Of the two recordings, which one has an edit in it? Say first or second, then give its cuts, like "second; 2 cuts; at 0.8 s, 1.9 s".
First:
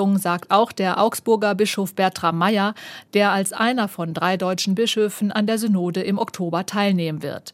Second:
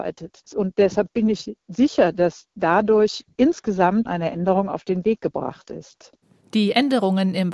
second; 1 cut; at 4.1 s